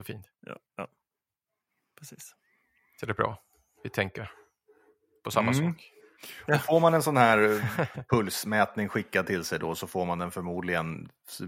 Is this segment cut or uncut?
uncut